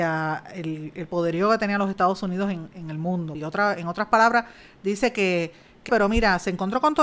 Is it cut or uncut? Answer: cut